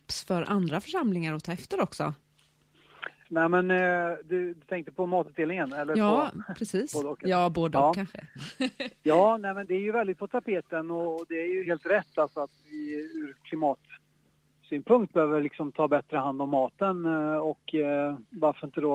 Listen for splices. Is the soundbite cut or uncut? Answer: cut